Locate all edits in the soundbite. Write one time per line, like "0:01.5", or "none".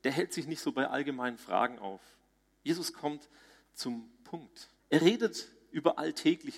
0:04.8